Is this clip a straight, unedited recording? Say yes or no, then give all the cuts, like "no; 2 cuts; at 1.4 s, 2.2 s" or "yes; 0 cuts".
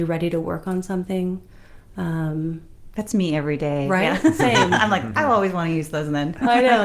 yes; 0 cuts